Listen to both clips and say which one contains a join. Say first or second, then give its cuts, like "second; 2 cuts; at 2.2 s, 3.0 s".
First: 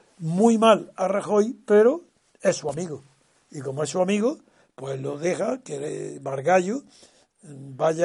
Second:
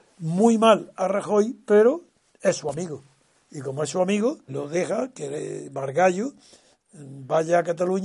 second; 1 cut; at 4.5 s